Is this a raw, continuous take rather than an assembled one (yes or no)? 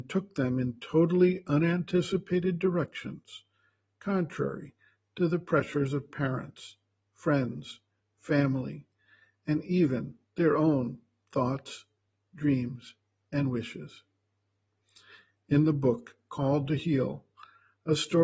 yes